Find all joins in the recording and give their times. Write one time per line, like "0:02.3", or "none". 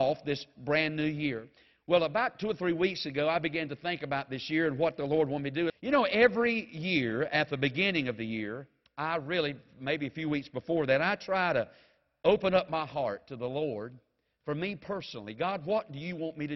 0:05.7